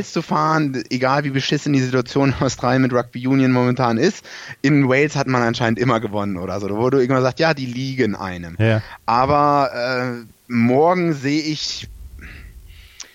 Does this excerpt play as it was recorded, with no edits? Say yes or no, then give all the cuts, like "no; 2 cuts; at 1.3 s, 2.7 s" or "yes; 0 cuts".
yes; 0 cuts